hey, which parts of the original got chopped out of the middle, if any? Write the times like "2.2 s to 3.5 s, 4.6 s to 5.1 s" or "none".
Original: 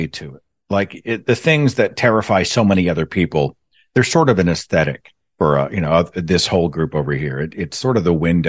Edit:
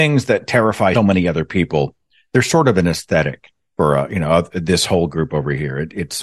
2.4 s to 2.6 s